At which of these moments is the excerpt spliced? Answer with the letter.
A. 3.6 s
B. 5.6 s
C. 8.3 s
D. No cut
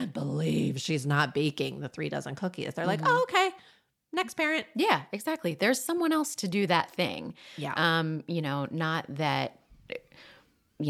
D